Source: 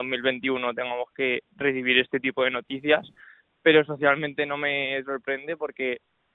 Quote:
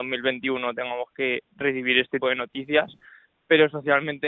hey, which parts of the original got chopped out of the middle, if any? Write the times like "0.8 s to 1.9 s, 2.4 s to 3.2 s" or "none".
2.2 s to 2.4 s